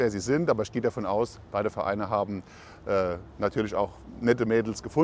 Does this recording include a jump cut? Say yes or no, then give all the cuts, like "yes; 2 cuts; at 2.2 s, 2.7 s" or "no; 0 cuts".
no; 0 cuts